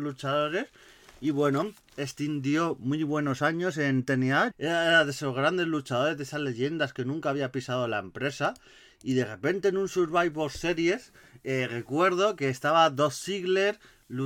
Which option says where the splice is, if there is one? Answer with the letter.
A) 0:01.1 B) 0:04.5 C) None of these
B